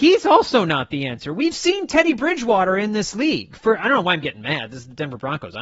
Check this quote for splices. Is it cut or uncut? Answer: uncut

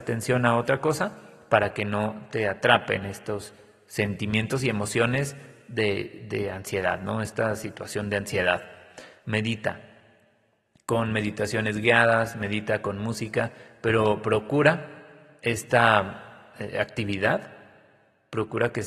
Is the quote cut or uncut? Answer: cut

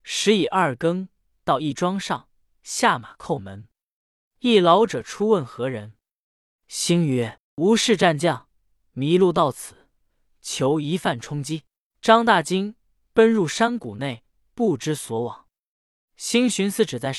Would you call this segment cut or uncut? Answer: cut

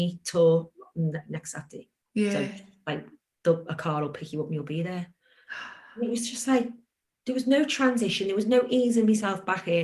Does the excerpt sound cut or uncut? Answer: uncut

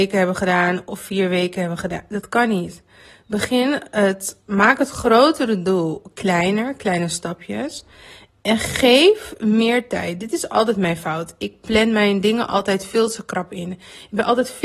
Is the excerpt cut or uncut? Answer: uncut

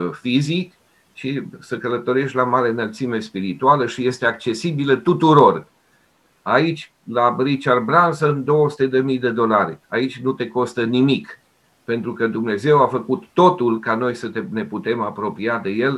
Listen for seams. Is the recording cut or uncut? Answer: uncut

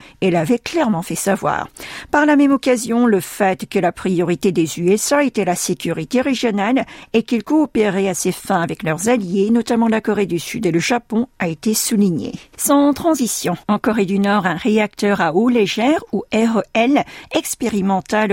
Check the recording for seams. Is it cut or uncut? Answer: uncut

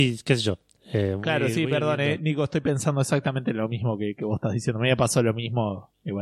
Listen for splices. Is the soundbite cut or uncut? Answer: uncut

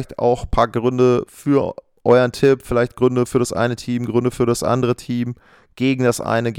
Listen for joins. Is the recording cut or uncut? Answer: uncut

